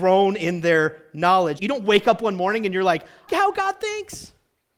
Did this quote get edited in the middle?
yes; 2 cuts; at 1.6 s, 3.3 s

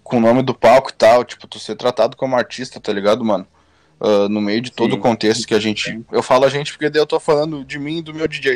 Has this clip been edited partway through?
yes; 1 cut; at 6.1 s

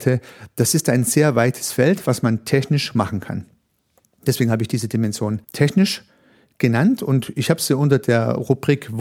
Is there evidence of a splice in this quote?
yes; 1 cut; at 5.4 s

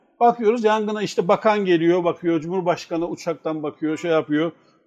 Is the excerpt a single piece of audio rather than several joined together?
yes; 0 cuts

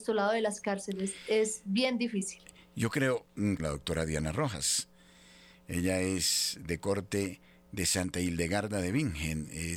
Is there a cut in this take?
yes; 1 cut; at 3.6 s

